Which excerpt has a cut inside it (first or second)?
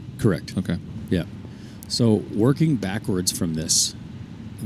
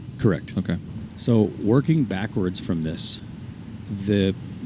second